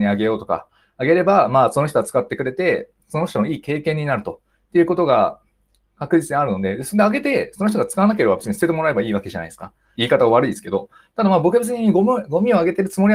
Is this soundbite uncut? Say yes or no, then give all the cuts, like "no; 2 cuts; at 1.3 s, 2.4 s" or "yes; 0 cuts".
no; 1 cut; at 10.0 s